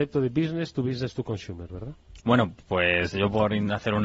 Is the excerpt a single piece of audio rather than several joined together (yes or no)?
no